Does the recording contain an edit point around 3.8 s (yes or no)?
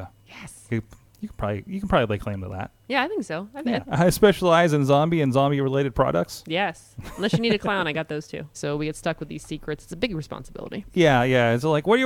yes